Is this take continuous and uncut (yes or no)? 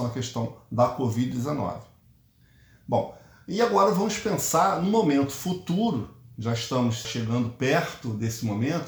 no